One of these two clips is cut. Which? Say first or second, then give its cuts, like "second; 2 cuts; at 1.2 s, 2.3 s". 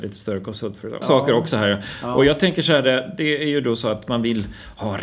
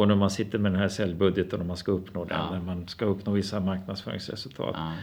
first; 1 cut; at 1.0 s